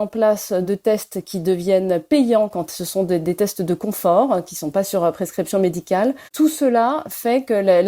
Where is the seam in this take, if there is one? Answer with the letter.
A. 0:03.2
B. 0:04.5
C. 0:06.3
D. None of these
C